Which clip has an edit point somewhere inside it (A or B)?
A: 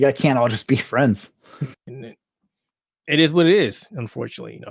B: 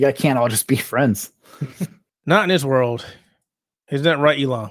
A